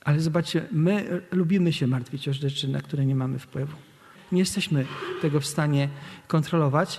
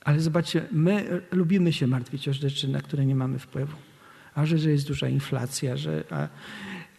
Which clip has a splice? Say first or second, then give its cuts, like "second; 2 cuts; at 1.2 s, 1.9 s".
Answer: first; 1 cut; at 4.1 s